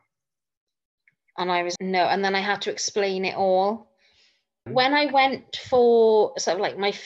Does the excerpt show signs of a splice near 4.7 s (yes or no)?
yes